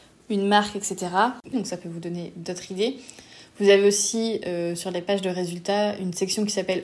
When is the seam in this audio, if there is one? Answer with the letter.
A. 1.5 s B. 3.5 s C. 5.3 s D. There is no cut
A